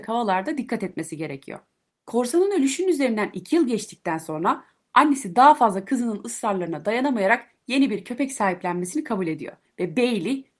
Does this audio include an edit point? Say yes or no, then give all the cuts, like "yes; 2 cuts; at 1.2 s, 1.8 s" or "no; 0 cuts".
yes; 1 cut; at 1.9 s